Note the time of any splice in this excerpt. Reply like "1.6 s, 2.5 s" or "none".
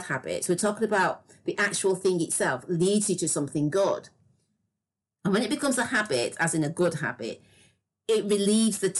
5.0 s